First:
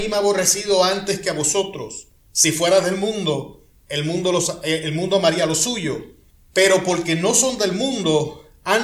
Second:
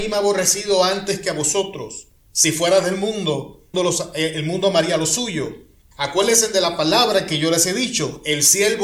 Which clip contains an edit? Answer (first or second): second